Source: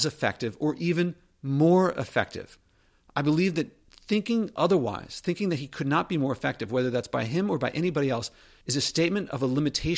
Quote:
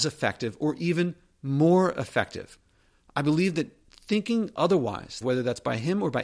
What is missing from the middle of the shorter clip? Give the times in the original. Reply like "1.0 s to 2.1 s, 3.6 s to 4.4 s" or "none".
5.2 s to 6.7 s